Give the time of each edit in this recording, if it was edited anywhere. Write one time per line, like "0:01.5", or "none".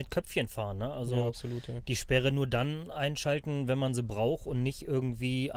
none